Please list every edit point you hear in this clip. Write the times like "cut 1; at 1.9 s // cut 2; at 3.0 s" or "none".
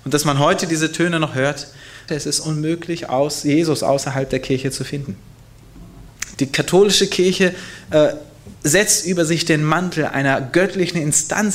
cut 1; at 2.1 s // cut 2; at 6.3 s